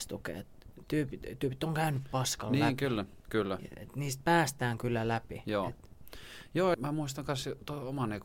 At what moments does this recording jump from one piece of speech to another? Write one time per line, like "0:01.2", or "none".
0:06.7